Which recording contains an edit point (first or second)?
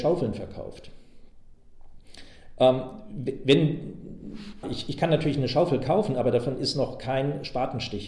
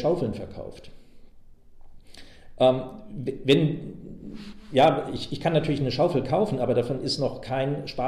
first